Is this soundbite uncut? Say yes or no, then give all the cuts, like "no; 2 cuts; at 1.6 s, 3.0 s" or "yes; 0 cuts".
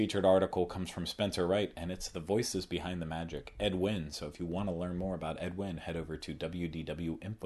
yes; 0 cuts